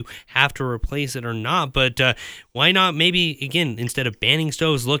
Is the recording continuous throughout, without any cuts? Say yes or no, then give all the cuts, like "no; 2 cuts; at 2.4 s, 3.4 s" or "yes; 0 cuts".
yes; 0 cuts